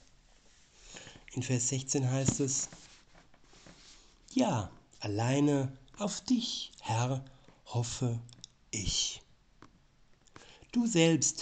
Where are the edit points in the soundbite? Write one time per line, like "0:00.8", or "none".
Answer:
none